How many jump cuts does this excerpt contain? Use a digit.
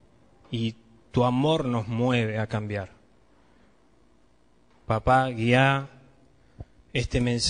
0